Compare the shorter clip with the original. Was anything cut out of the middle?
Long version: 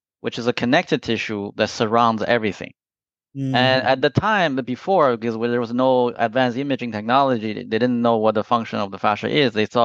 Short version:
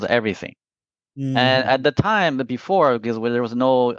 no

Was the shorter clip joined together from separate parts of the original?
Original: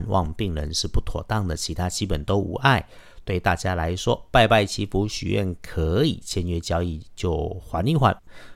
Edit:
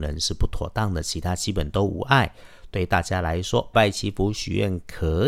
yes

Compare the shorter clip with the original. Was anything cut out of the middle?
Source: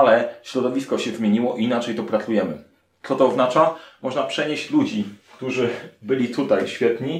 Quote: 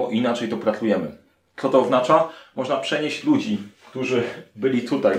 no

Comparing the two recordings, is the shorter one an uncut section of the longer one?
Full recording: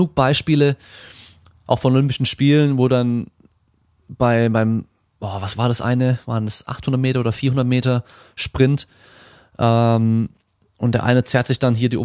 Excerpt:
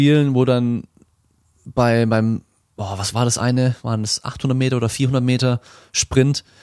yes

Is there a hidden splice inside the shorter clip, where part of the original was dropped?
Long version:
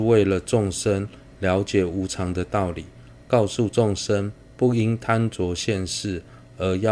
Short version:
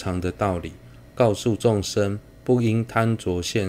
no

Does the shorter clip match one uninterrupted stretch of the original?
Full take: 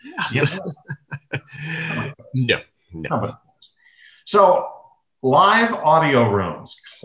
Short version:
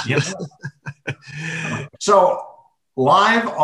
no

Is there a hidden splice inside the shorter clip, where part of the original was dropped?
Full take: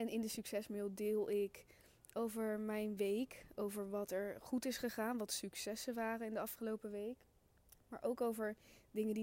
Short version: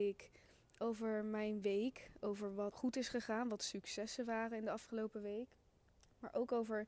yes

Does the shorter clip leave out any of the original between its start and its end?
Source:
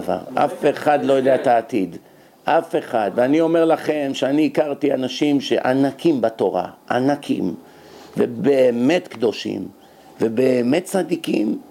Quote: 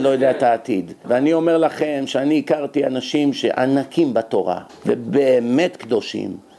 yes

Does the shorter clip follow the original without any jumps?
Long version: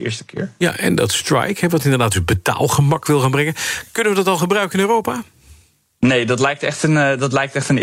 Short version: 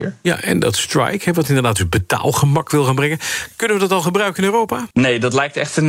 no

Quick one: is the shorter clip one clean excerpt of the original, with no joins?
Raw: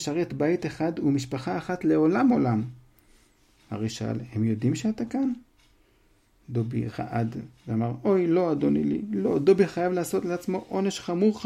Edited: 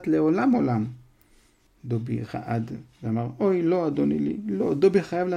no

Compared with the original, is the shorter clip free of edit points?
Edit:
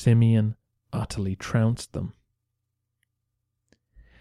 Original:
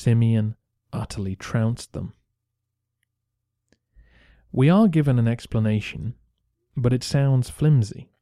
yes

